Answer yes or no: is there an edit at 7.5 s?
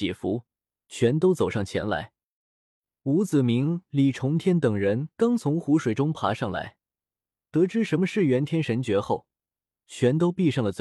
no